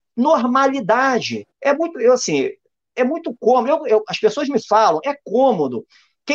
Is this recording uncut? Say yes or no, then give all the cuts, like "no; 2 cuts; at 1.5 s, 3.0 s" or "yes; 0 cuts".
no; 1 cut; at 1.5 s